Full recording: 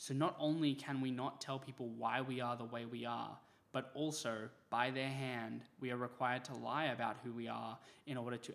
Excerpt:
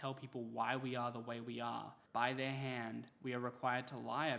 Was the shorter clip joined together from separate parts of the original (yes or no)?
yes